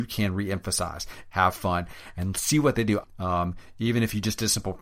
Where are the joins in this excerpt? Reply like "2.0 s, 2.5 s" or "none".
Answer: 1.3 s, 3.0 s